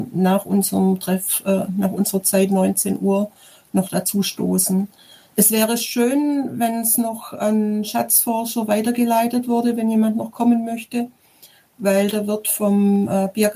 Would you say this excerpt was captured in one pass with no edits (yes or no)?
yes